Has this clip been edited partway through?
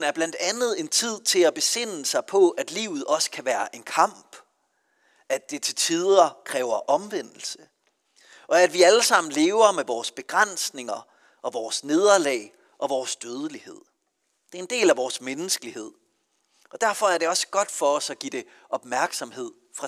no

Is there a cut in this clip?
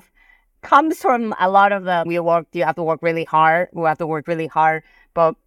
yes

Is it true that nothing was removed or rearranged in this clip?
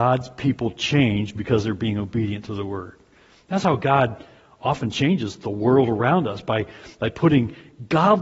yes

